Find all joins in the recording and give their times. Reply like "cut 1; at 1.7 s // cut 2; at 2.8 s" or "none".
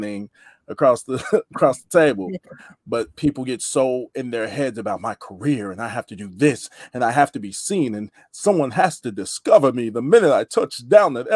cut 1; at 2.8 s